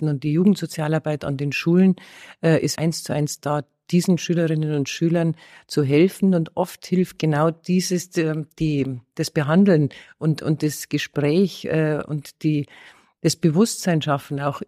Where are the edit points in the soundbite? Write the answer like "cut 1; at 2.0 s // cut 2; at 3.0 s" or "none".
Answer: cut 1; at 2.8 s

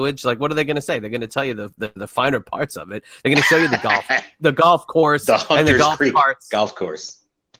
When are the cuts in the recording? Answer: none

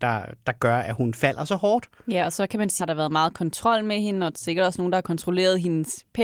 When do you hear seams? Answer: cut 1; at 2.8 s

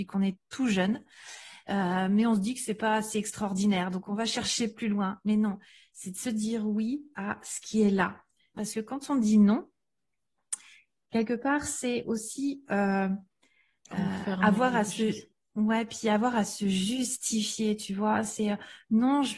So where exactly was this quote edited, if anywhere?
cut 1; at 8.6 s

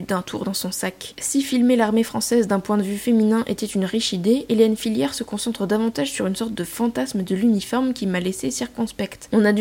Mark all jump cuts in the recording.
none

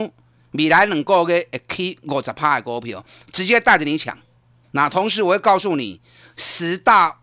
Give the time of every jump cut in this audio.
cut 1; at 4.6 s

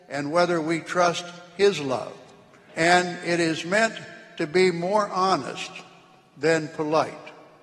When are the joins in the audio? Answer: cut 1; at 2.7 s

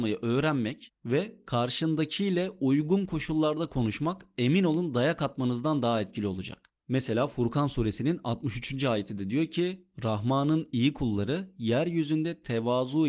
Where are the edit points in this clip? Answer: none

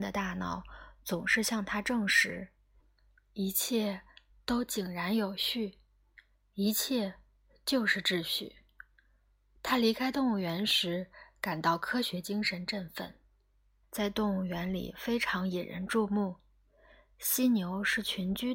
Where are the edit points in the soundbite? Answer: cut 1; at 13.8 s

